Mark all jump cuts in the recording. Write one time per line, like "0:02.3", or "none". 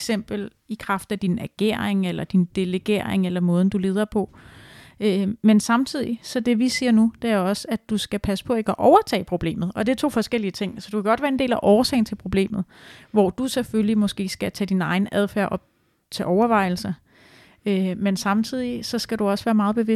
none